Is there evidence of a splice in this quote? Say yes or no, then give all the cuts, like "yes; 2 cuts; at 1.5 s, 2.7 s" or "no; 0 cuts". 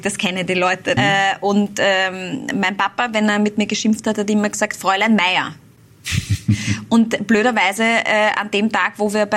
yes; 1 cut; at 1.0 s